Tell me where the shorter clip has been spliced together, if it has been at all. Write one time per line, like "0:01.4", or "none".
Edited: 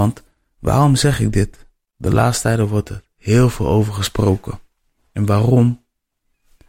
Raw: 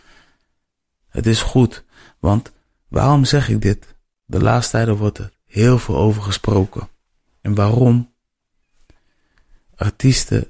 none